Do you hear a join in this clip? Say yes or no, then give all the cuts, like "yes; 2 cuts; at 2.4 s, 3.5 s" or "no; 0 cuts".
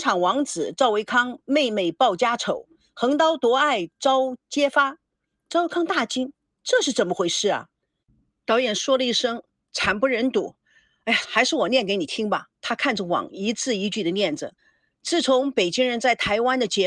yes; 3 cuts; at 11.2 s, 12.5 s, 14.6 s